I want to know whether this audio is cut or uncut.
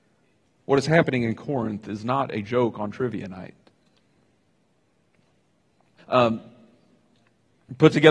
cut